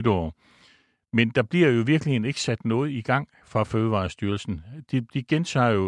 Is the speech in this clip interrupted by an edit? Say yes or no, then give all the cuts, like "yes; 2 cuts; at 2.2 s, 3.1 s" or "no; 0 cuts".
no; 0 cuts